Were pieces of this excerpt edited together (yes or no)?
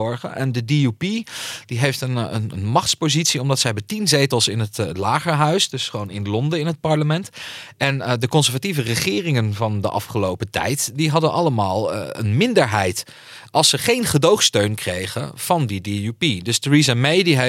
no